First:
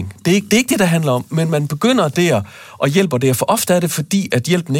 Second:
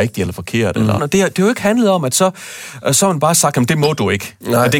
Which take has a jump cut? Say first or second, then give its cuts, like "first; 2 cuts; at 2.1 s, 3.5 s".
second; 1 cut; at 1.0 s